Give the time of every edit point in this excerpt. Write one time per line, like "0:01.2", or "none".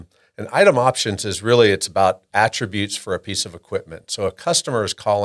none